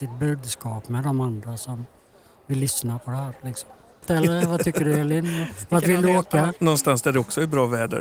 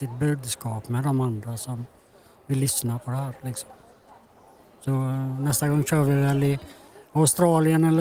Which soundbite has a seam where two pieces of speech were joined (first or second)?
first